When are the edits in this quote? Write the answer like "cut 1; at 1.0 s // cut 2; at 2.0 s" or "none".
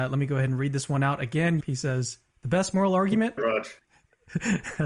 cut 1; at 1.6 s // cut 2; at 3.4 s